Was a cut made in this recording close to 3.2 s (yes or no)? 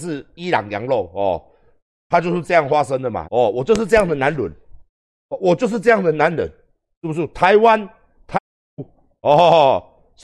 yes